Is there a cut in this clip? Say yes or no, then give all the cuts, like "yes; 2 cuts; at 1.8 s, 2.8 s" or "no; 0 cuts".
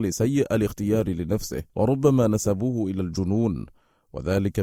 yes; 1 cut; at 1.7 s